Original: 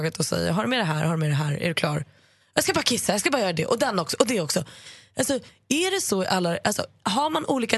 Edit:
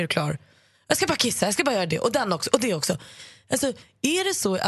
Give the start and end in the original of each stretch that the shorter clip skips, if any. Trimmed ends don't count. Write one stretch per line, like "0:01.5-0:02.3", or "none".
none

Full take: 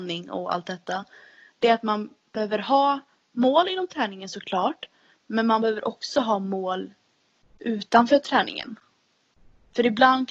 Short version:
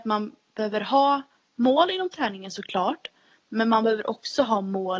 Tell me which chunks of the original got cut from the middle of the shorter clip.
none

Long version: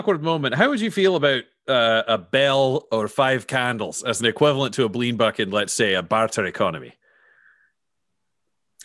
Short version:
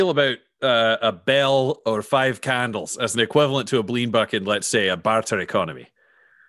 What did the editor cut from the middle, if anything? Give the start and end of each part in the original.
none

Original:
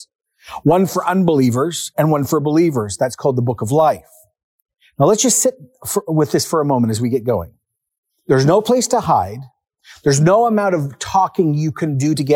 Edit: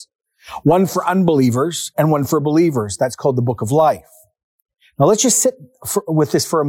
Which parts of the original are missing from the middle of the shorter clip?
none

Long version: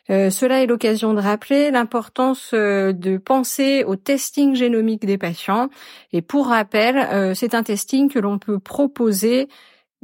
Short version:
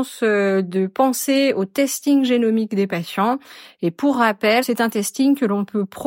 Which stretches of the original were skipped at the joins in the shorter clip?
0:06.9-0:07.4

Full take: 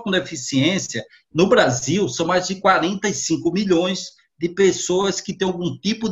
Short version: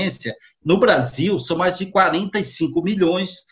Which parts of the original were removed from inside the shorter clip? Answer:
none

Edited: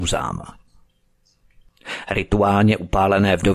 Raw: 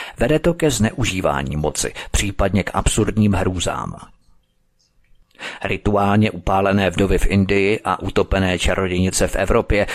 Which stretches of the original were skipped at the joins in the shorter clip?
none

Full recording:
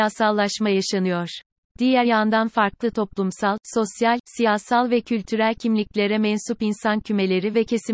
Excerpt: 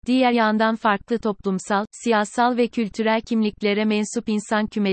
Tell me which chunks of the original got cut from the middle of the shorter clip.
0:03.6-0:04.2

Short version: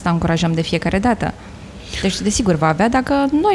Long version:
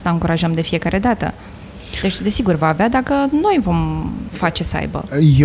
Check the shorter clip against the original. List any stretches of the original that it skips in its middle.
none

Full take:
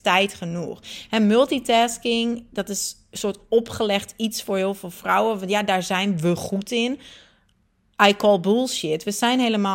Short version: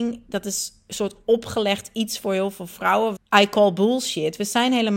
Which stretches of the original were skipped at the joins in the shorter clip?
0:05.4-0:07.8

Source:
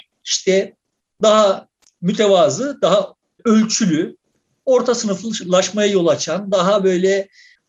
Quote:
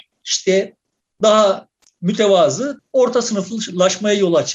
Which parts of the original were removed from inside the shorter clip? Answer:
0:02.8-0:04.5

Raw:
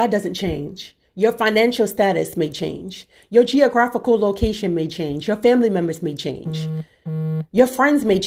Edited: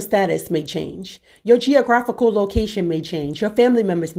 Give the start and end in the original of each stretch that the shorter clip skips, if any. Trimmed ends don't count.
none

